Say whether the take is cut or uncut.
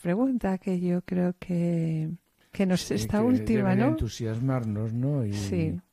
cut